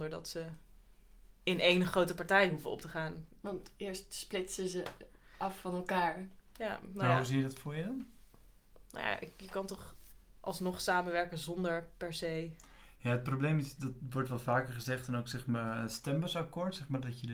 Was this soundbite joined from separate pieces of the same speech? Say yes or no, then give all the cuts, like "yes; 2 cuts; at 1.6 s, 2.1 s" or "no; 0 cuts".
no; 0 cuts